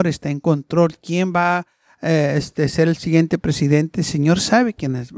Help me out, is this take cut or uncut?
uncut